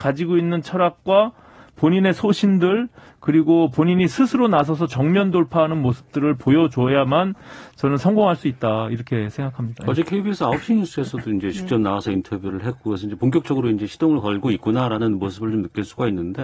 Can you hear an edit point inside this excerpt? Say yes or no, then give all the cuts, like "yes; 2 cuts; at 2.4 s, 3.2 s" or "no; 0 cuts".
no; 0 cuts